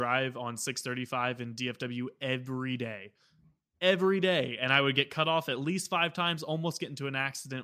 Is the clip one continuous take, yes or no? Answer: yes